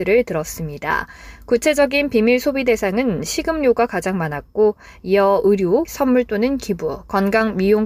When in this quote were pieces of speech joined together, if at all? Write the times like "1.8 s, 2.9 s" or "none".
5.8 s